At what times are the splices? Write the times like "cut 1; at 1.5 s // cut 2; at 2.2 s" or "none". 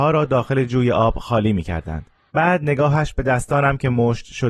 cut 1; at 2.3 s